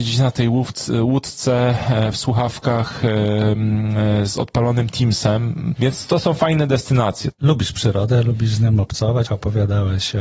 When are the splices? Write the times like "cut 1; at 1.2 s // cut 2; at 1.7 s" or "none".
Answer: cut 1; at 5.8 s // cut 2; at 7.3 s // cut 3; at 9.3 s